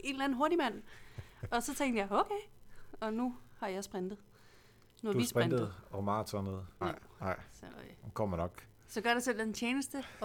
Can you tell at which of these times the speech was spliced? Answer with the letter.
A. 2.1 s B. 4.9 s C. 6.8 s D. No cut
C